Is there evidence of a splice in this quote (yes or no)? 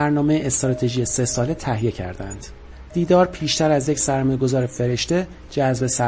yes